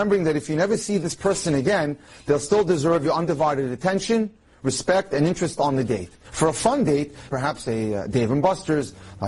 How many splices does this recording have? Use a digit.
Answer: 2